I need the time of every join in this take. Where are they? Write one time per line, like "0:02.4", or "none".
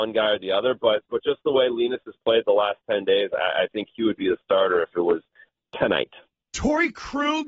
none

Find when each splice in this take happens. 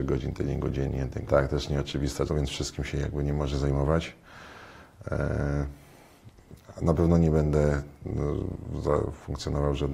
0:01.3
0:02.3

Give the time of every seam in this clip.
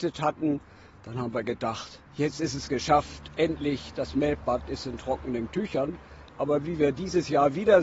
0:02.1

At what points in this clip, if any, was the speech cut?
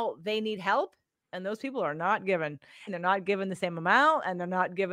0:02.9

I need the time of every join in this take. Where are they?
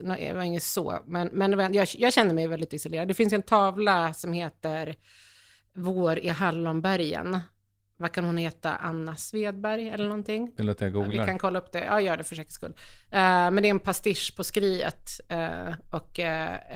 none

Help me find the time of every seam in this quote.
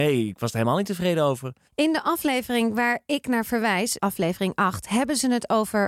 0:04.0

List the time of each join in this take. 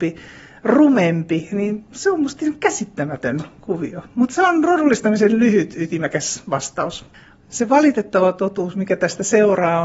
none

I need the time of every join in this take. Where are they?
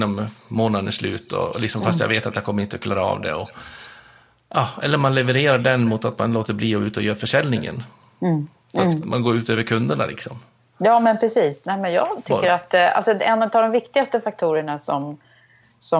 none

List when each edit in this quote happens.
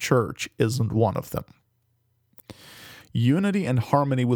0:03.0

